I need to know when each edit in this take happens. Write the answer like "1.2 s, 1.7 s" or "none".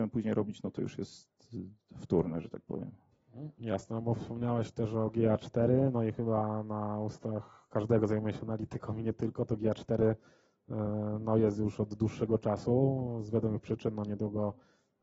none